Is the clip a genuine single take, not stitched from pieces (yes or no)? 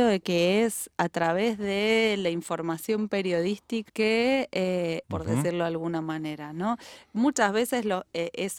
no